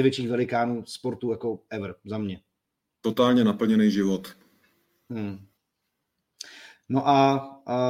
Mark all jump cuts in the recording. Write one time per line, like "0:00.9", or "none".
none